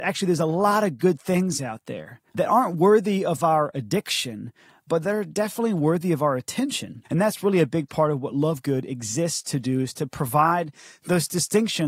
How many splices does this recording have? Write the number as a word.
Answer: two